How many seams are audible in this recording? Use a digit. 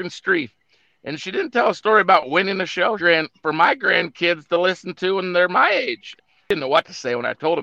2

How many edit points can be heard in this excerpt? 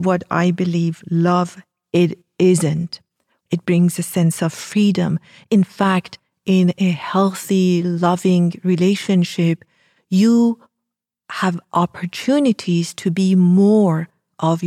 1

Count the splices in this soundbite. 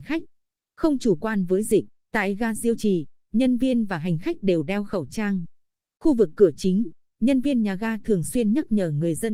1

